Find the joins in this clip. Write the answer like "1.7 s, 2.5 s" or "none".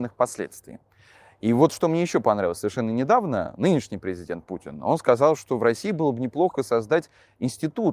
none